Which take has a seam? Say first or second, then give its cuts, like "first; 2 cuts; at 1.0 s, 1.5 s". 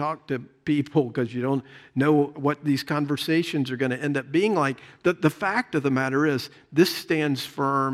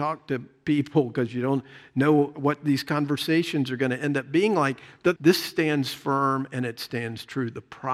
second; 1 cut; at 5.2 s